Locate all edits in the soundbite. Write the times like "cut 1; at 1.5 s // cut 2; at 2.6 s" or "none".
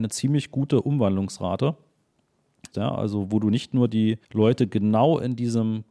cut 1; at 2.7 s // cut 2; at 4.2 s